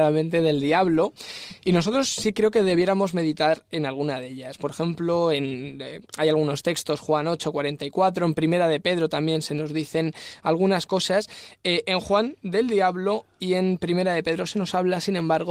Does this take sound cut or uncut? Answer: uncut